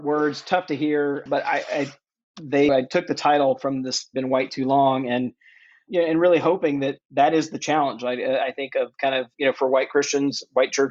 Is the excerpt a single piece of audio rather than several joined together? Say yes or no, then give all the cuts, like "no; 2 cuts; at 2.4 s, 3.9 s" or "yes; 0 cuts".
no; 2 cuts; at 1.3 s, 2.7 s